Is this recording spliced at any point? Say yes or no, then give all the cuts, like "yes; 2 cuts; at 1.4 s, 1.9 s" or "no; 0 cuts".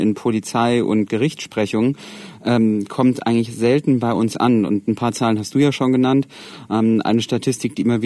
no; 0 cuts